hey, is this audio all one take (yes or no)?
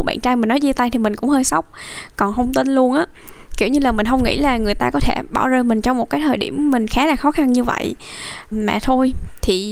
no